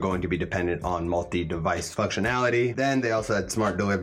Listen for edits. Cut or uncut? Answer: uncut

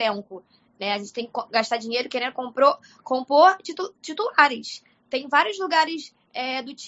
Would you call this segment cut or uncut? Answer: uncut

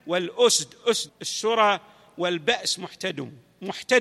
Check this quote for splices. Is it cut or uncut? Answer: cut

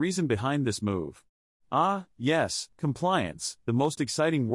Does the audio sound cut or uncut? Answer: cut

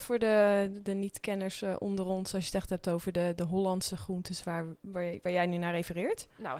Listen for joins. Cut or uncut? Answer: uncut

